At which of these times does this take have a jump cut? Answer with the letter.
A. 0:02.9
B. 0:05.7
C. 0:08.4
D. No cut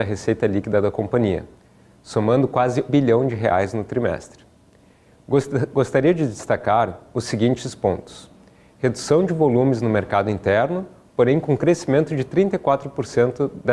A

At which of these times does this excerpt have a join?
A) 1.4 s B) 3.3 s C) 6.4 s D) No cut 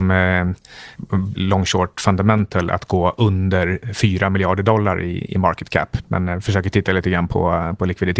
A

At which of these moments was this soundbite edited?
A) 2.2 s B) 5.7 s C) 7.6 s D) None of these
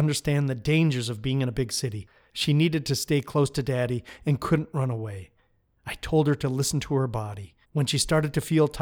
C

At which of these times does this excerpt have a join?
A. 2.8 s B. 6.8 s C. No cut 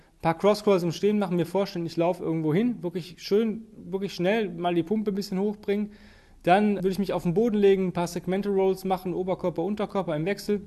B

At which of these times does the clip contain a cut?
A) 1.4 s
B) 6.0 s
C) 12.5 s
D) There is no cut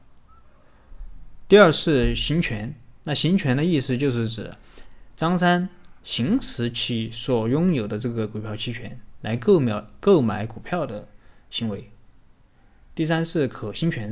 B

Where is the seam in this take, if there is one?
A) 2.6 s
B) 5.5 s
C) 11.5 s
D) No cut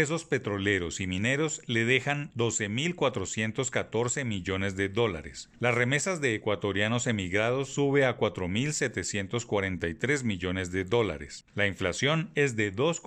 C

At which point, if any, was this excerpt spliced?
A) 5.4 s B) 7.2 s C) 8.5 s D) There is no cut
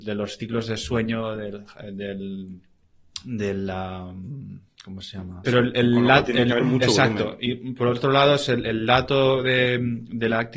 A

